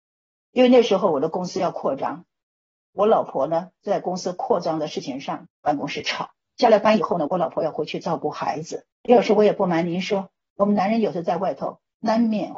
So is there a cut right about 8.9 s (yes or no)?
yes